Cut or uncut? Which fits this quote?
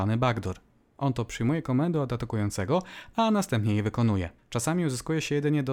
cut